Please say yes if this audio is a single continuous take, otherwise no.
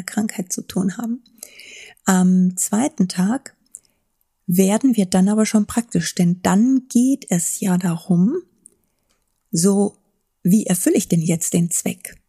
yes